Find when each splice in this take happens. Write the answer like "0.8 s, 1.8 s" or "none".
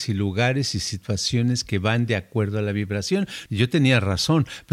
3.5 s